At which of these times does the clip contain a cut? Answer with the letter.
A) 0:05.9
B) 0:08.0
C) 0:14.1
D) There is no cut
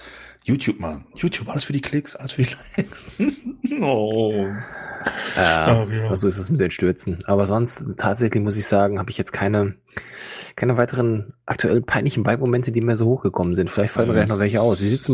D